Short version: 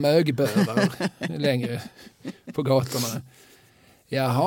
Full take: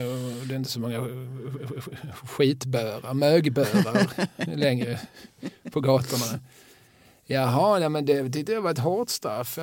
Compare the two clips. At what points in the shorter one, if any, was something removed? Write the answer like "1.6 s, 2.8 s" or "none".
none